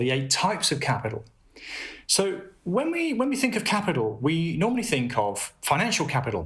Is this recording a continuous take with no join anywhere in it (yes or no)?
yes